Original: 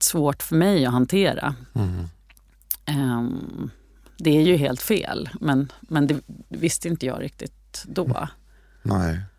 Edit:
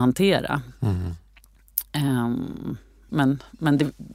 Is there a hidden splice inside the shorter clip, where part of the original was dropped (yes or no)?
yes